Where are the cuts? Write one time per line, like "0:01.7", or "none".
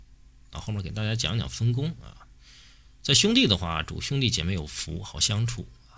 none